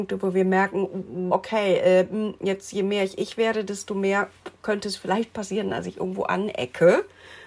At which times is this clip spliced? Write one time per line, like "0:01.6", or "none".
0:01.3

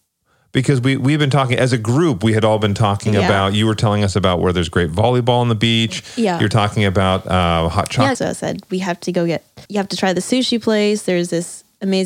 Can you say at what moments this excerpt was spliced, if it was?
0:08.1
0:09.7

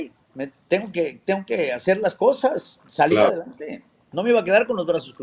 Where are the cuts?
none

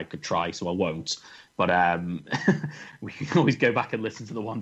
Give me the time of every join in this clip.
none

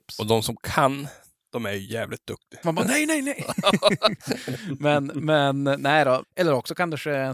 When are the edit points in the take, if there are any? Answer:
0:02.6
0:04.2
0:06.2

